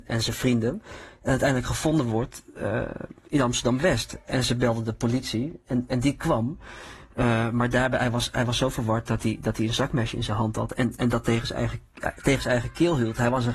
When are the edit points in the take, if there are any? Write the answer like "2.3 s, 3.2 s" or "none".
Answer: none